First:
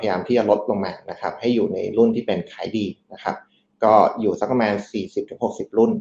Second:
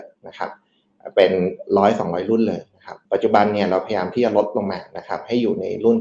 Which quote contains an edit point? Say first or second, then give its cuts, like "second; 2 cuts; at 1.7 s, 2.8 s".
second; 1 cut; at 3.1 s